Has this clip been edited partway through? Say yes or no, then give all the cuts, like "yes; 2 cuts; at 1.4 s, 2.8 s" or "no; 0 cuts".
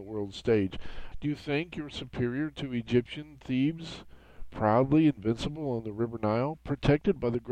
yes; 1 cut; at 1.1 s